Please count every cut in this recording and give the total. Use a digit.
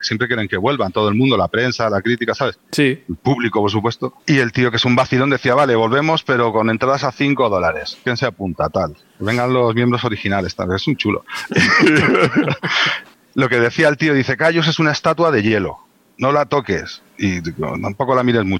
0